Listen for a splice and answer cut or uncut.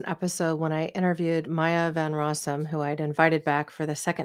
uncut